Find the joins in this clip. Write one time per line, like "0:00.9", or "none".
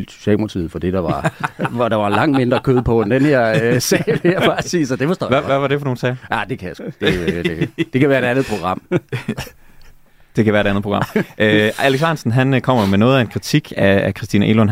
none